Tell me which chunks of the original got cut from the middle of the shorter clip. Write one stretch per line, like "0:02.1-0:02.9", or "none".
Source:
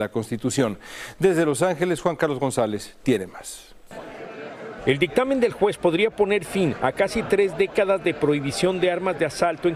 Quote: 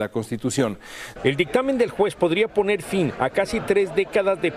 0:01.2-0:04.8